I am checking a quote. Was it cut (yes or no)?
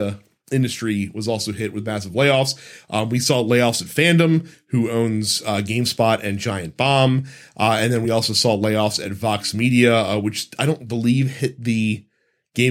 no